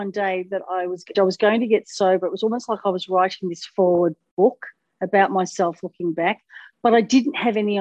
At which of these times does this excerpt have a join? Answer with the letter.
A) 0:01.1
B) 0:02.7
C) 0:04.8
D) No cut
A